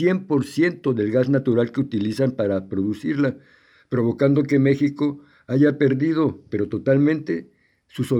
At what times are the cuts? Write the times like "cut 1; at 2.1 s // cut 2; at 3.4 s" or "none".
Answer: cut 1; at 6.5 s